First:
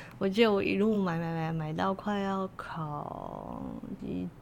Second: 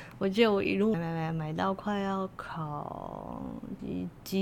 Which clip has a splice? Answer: second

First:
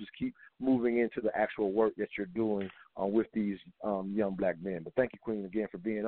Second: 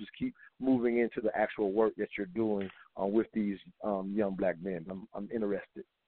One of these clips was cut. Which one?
second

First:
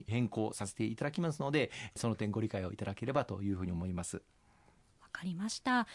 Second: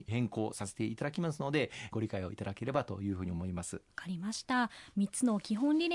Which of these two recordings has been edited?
second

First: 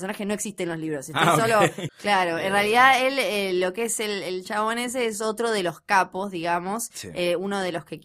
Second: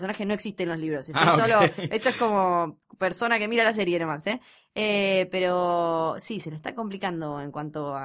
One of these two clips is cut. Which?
first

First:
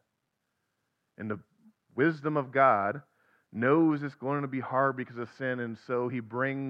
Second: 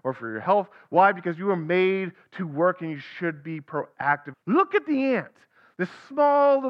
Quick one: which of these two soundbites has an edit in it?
second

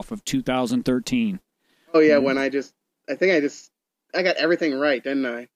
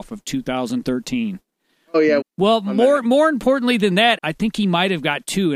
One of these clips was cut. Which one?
second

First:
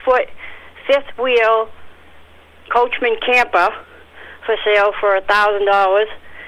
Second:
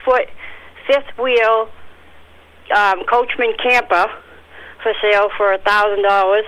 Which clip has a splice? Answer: first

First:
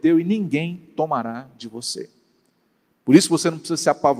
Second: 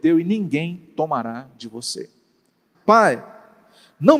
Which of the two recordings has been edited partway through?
second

